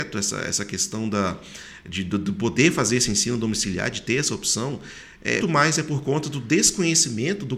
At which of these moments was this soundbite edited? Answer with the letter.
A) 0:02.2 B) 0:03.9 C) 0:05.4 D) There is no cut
C